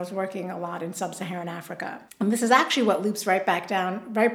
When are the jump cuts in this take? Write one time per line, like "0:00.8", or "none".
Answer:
0:02.1